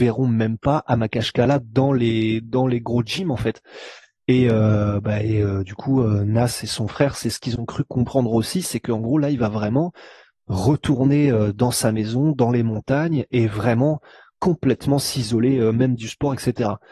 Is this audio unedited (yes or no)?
yes